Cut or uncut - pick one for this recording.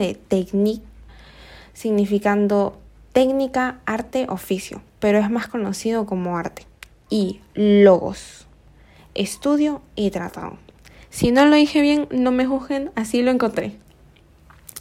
uncut